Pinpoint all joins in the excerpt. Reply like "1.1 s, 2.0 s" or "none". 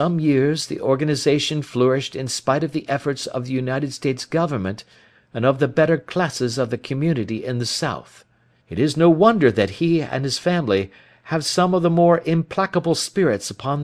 8.6 s

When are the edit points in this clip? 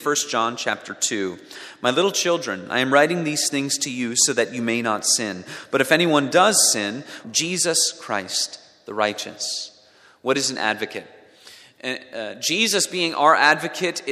7.2 s

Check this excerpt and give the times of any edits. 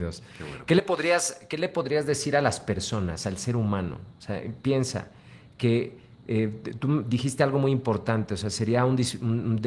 none

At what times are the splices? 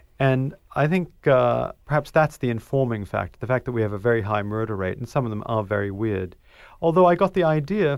none

